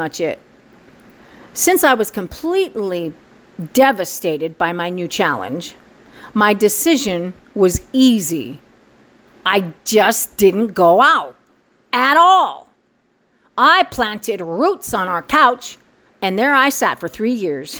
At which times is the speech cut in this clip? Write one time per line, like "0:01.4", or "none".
none